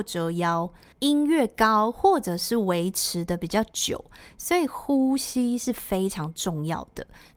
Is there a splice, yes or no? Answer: yes